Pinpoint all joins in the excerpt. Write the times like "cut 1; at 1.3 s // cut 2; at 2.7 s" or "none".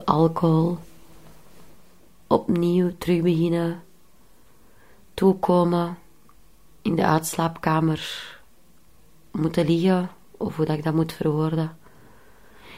none